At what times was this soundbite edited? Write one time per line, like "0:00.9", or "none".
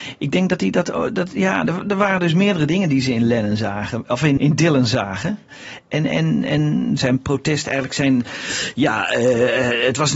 0:04.4

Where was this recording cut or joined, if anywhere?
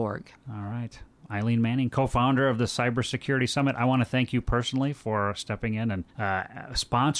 0:06.1

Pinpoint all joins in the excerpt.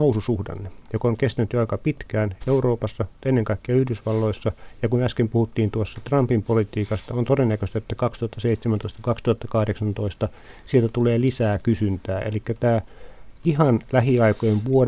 none

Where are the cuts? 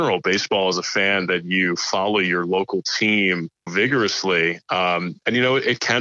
0:03.7

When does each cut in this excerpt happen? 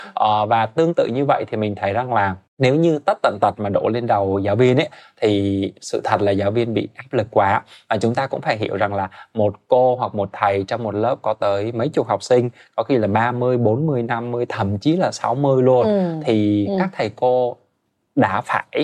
none

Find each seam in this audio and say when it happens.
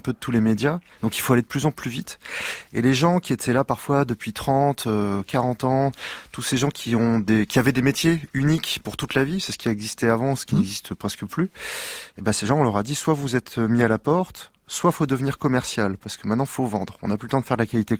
none

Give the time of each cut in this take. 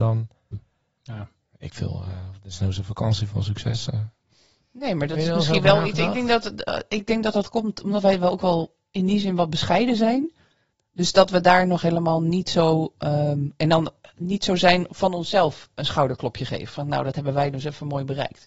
none

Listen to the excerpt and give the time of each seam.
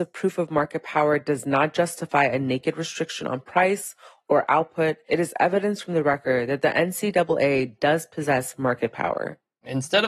0:05.1

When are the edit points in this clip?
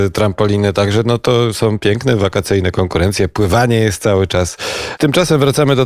0:05.0

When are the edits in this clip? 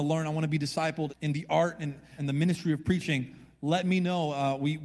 0:01.1
0:02.2

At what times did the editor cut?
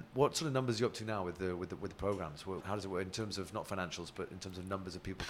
0:02.6

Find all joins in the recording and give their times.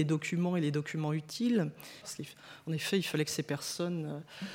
0:02.0

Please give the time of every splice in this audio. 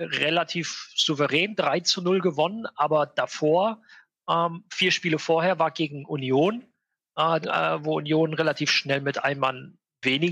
0:07.4

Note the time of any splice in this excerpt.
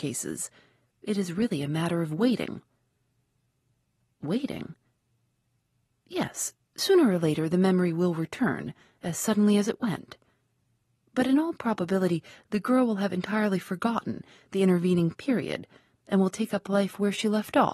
none

